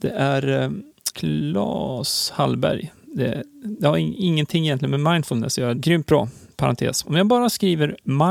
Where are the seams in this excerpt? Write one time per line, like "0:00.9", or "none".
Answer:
0:01.1
0:05.8
0:07.0